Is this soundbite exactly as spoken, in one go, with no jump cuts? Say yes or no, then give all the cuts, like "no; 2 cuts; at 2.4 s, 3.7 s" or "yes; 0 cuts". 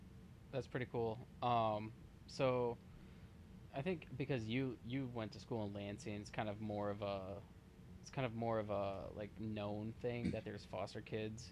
yes; 0 cuts